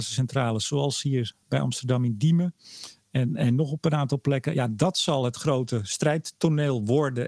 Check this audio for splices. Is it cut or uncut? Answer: uncut